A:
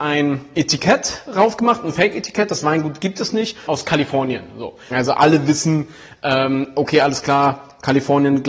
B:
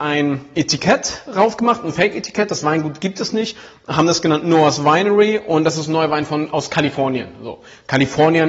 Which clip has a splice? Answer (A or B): A